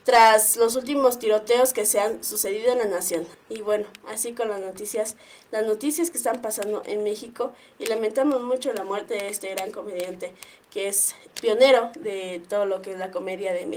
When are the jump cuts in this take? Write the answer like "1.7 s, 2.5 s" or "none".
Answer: 3.3 s, 11.3 s